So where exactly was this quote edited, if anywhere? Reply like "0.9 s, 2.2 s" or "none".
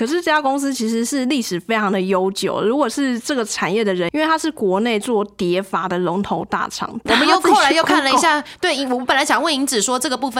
4.1 s, 7.1 s